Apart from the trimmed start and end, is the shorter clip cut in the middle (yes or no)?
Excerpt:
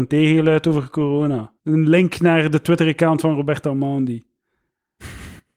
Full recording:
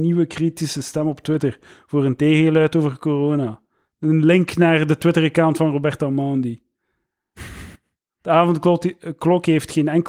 yes